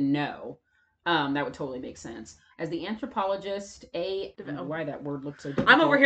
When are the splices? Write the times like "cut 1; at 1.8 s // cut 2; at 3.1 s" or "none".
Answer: cut 1; at 2.5 s // cut 2; at 4.3 s